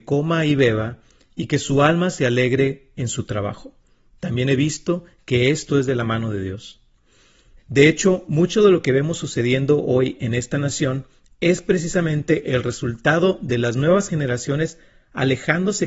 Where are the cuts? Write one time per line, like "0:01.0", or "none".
0:07.6